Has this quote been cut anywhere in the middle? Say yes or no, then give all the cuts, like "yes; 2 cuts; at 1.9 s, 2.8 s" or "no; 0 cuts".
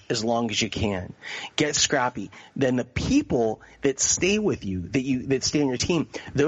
no; 0 cuts